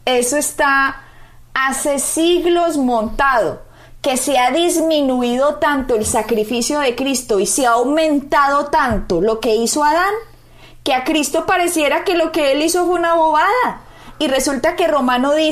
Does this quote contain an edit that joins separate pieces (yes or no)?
no